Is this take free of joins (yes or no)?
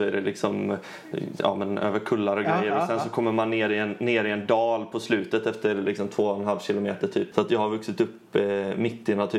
no